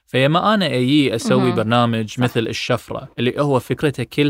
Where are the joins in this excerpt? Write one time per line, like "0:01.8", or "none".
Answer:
0:03.1